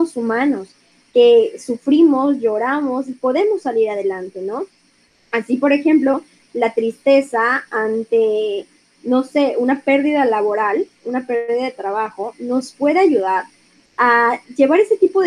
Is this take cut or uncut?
uncut